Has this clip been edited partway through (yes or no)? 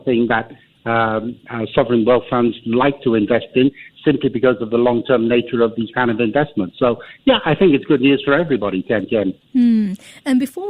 no